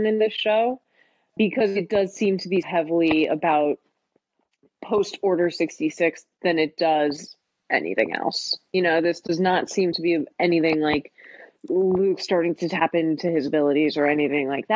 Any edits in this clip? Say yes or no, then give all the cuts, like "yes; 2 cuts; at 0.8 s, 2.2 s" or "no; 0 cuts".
yes; 2 cuts; at 1.4 s, 2.6 s